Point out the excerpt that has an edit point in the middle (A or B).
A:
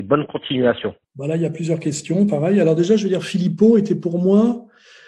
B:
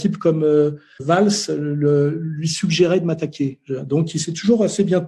A